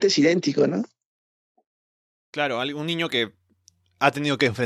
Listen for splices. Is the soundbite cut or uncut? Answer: uncut